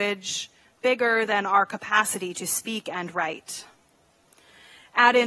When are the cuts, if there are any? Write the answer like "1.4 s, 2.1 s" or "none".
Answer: none